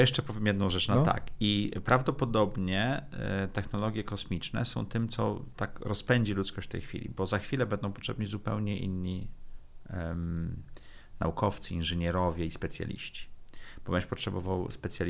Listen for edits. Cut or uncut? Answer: uncut